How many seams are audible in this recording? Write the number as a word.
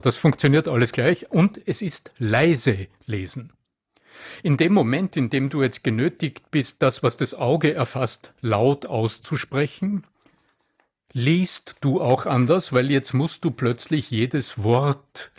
zero